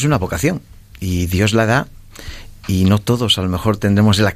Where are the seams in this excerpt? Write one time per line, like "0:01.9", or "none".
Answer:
none